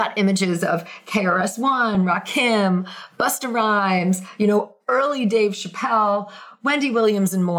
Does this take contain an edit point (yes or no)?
no